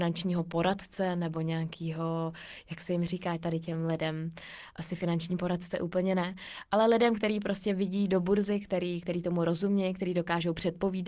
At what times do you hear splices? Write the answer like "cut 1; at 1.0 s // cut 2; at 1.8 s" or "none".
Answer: none